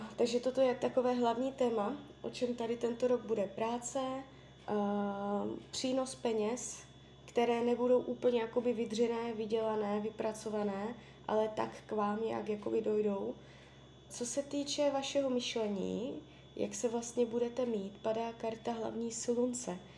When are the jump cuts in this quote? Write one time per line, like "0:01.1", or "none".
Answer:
0:14.1